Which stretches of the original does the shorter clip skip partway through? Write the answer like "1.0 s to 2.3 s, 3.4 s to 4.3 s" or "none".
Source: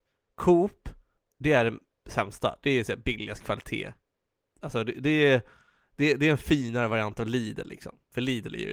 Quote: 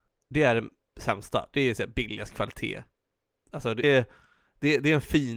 4.9 s to 5.2 s